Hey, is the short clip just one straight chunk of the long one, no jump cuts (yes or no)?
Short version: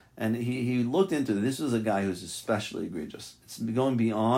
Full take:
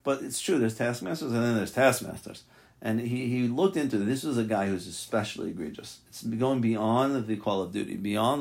yes